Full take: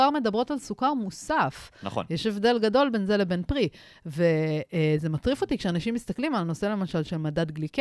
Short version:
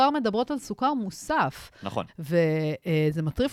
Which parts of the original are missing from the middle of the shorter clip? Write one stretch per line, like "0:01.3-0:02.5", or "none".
0:02.1-0:03.9